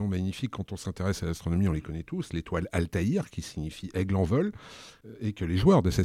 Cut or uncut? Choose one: uncut